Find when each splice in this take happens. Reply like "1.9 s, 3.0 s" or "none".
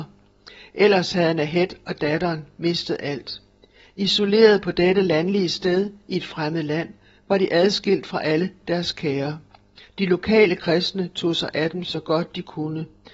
9.8 s